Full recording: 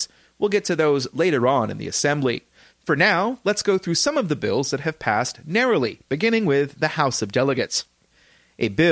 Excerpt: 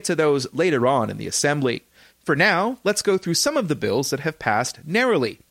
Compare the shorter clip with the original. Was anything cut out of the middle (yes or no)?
no